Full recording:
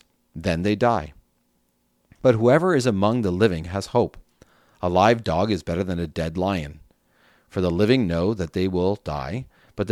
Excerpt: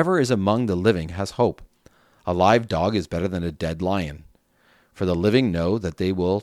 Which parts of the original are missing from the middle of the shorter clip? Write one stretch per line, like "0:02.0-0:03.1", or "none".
none